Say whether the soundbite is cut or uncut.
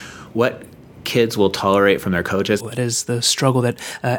cut